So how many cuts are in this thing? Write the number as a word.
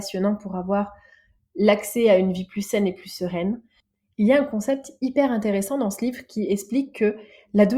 zero